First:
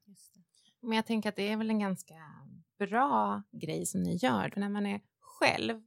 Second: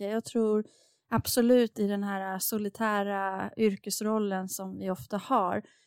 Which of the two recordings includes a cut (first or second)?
first